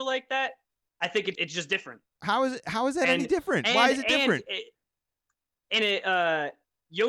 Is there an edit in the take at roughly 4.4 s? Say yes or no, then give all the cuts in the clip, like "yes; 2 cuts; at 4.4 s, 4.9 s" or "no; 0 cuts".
no; 1 cut; at 1.4 s